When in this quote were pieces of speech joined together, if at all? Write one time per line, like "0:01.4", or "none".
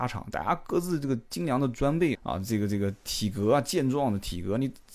0:02.1